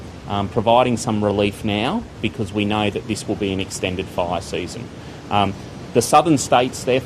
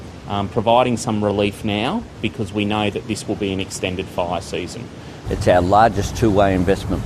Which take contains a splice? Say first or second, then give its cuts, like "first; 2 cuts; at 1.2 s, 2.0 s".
second; 1 cut; at 5.2 s